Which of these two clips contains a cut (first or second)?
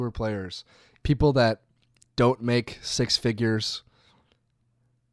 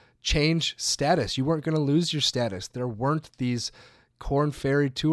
first